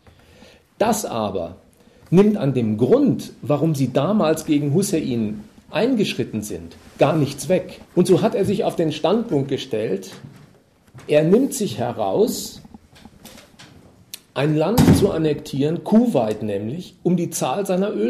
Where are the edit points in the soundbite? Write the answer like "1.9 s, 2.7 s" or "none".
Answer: 7.8 s